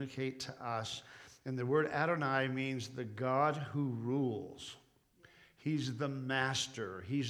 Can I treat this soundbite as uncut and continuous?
yes; 0 cuts

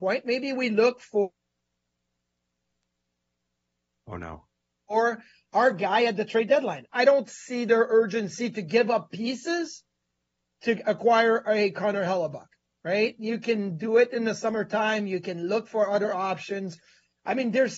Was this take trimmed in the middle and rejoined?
yes; 1 cut; at 6.8 s

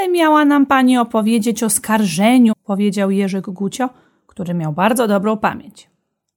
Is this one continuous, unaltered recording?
no; 1 cut; at 2.5 s

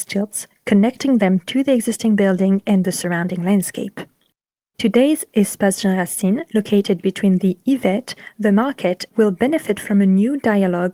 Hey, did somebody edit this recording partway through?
yes; 2 cuts; at 4.7 s, 9.1 s

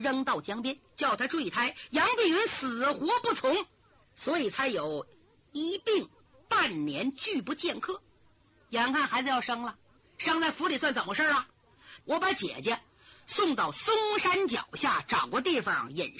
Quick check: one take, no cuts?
no; 2 cuts; at 0.9 s, 12.0 s

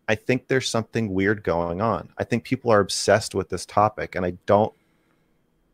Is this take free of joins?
yes; 0 cuts

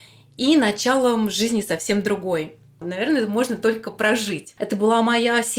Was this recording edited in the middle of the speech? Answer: yes; 2 cuts; at 2.8 s, 4.6 s

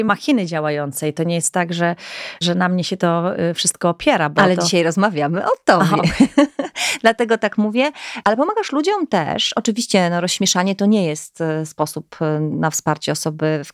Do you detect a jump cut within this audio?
no; 0 cuts

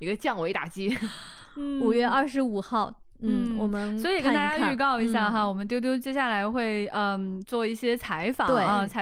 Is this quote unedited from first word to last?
yes; 0 cuts

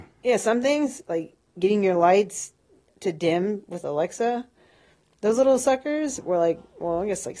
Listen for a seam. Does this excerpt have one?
yes; 1 cut; at 2.9 s

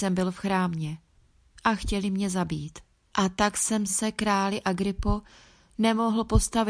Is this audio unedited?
no; 1 cut; at 3.1 s

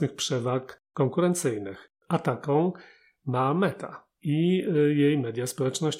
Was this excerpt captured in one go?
no; 1 cut; at 2.0 s

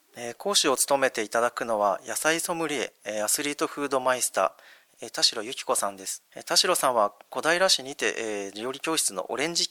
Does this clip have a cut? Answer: yes; 2 cuts; at 4.9 s, 6.3 s

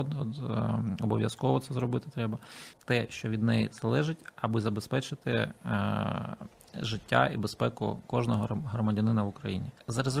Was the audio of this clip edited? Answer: yes; 1 cut; at 2.7 s

